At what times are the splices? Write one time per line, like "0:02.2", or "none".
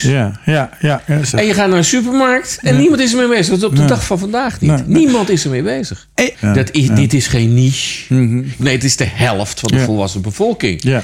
0:06.3
0:08.6